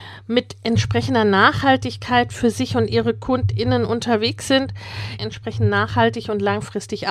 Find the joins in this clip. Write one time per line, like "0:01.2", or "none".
0:05.2

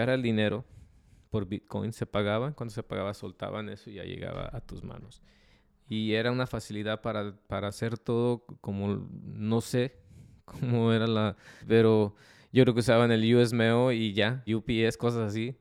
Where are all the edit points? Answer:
0:11.6
0:14.5

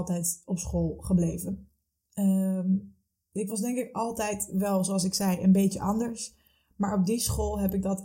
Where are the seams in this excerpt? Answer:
none

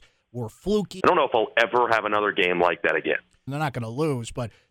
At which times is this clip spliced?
0:01.0
0:03.5

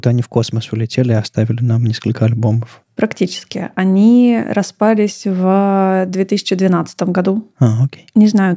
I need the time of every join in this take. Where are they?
none

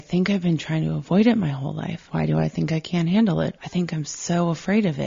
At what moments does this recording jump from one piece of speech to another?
0:02.1
0:03.6

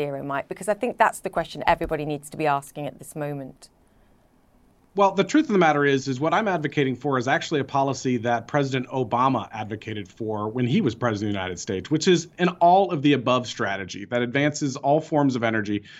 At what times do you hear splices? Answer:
none

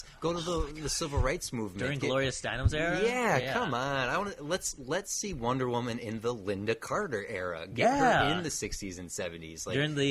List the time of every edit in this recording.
none

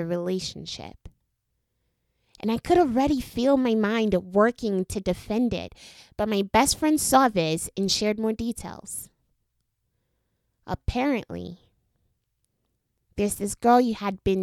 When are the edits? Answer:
none

